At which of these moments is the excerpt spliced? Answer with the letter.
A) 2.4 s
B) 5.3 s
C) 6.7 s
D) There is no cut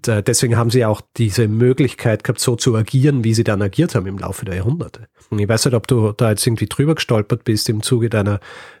B